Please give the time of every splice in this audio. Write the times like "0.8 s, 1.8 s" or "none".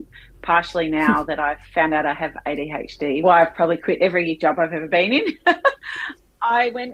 3.2 s